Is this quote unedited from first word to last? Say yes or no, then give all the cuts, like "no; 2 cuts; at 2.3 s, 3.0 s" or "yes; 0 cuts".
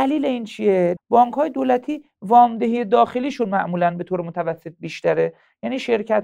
no; 1 cut; at 1.0 s